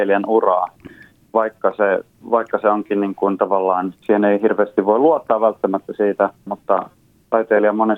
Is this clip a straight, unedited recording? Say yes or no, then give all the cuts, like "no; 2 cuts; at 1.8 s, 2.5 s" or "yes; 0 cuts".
no; 2 cuts; at 3.9 s, 6.5 s